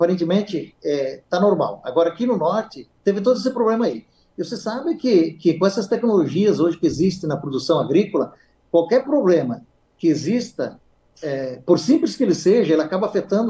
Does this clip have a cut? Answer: yes; 1 cut; at 3.0 s

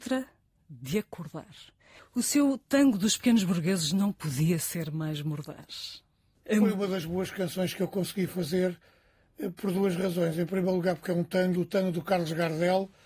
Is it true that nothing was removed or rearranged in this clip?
no; 1 cut; at 11.5 s

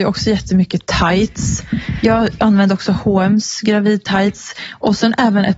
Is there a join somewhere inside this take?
no; 0 cuts

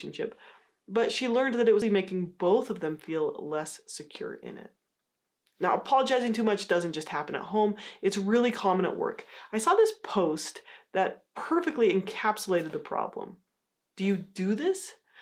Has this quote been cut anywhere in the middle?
yes; 1 cut; at 1.8 s

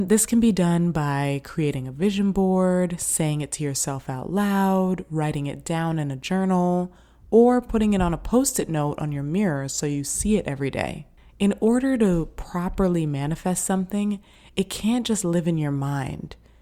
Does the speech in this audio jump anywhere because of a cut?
no; 0 cuts

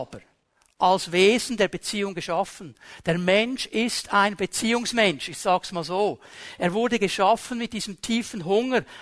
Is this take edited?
no; 0 cuts

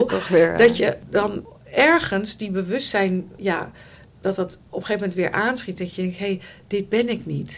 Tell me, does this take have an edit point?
no; 0 cuts

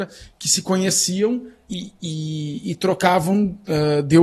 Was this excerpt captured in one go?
no; 1 cut; at 1.7 s

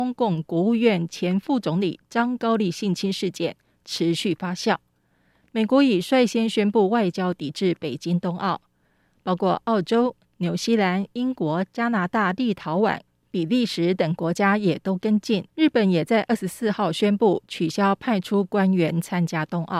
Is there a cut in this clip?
yes; 2 cuts; at 13.1 s, 15.5 s

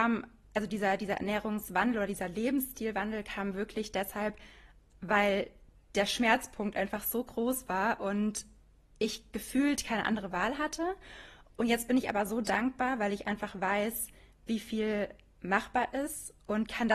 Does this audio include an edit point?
no; 0 cuts

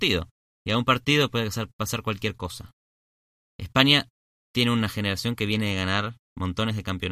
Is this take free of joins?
yes; 0 cuts

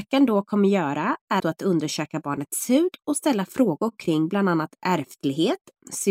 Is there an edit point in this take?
yes; 1 cut; at 1.4 s

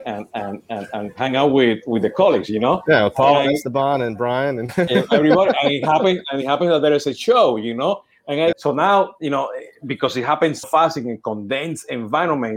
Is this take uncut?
no; 2 cuts; at 8.5 s, 10.6 s

